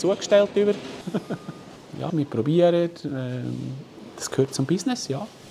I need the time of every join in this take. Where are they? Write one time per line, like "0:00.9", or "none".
0:01.0
0:02.1